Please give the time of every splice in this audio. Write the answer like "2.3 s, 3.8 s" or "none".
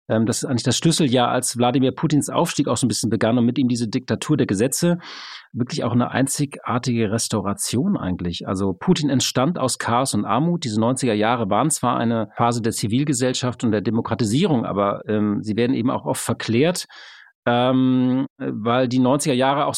none